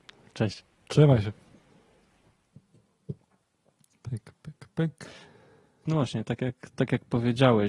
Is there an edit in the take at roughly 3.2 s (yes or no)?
no